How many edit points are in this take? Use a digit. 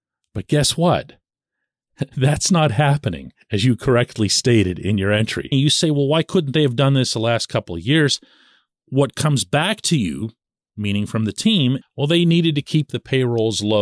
2